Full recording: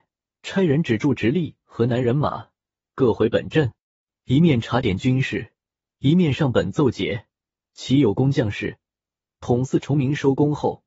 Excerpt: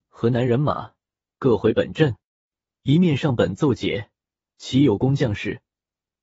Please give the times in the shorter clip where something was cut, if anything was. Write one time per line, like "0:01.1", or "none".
0:02.6